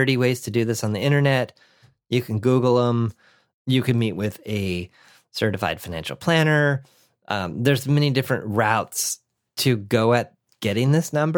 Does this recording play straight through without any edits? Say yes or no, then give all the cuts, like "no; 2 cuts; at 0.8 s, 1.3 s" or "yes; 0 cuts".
yes; 0 cuts